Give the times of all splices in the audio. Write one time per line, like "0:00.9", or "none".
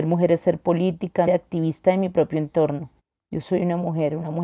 0:01.3